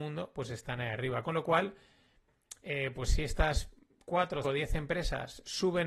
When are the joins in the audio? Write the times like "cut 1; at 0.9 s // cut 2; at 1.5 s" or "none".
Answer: cut 1; at 4.4 s